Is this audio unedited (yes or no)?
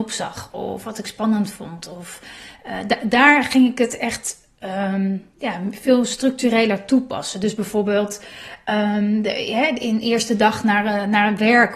yes